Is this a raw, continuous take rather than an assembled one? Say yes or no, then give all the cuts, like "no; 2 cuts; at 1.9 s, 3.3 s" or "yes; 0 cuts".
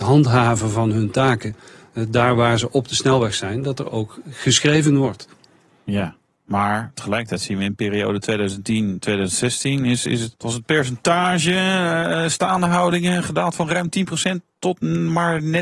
no; 1 cut; at 10.3 s